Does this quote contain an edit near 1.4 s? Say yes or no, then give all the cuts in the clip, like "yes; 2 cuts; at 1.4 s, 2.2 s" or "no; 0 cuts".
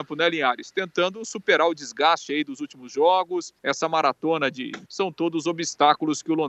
no; 2 cuts; at 3.6 s, 4.9 s